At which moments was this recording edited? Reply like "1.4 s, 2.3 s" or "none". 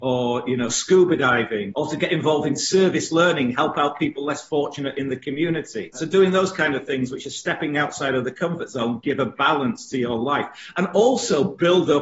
none